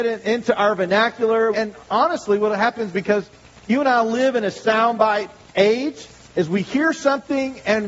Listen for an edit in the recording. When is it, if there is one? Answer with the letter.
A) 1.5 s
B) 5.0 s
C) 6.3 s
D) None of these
A